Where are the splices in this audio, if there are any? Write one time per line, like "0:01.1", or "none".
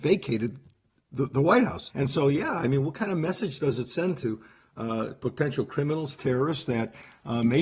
0:01.9